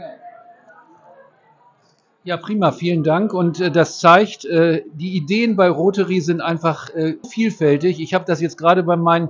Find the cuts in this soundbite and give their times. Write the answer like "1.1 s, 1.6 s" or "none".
7.2 s

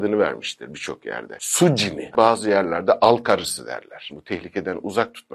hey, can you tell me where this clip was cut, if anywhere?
2.1 s, 4.1 s

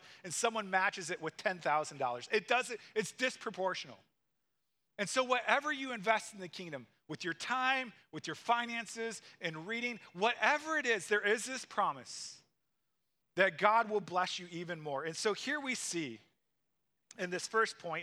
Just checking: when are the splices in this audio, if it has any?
none

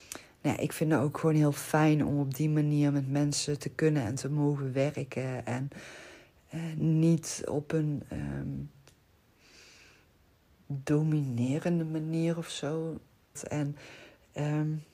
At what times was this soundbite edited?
13.3 s

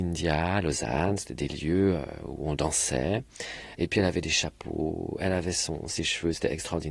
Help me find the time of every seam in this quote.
3.8 s

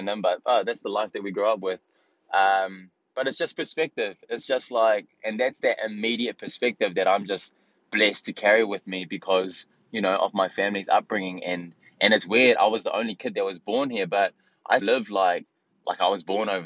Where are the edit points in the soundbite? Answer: 14.8 s

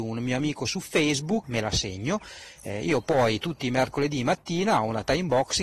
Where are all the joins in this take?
1.4 s

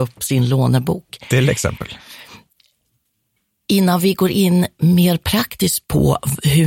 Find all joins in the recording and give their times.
none

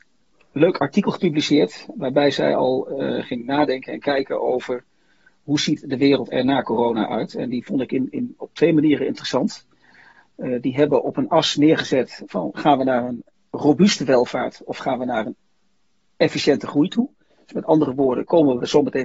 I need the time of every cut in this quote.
8.4 s

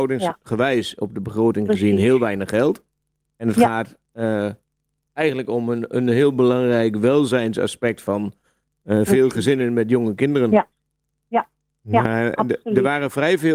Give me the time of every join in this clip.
none

